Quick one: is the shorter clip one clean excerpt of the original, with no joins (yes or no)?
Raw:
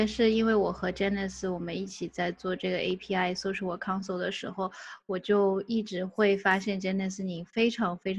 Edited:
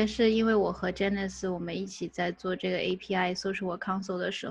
yes